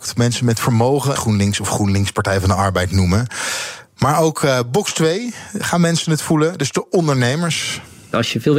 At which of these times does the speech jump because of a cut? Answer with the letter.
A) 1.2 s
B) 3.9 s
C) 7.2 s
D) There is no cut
A